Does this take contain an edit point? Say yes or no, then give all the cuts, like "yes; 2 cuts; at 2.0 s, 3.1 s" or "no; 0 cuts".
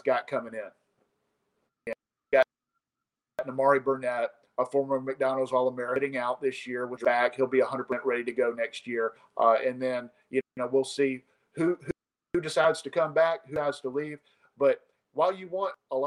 yes; 1 cut; at 1.7 s